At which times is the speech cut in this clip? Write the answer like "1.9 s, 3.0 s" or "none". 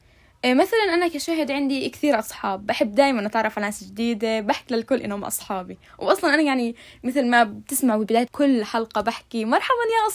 8.3 s